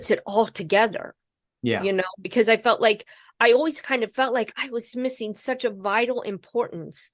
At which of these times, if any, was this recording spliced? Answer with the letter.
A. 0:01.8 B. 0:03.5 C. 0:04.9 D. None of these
C